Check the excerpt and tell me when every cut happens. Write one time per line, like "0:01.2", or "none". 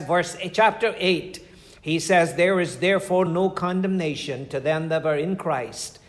0:03.3